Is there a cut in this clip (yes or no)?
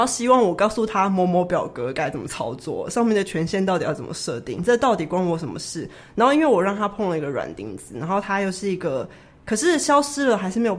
yes